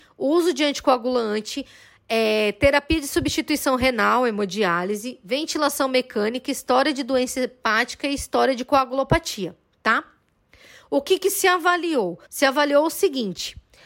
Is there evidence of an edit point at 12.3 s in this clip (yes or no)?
yes